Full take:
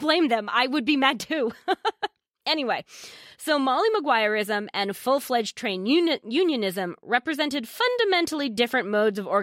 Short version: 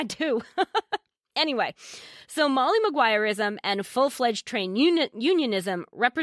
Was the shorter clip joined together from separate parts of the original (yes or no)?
no